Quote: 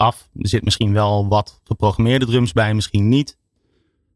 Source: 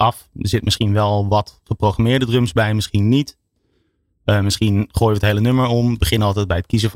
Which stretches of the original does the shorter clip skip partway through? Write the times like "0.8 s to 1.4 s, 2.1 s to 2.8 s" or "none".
none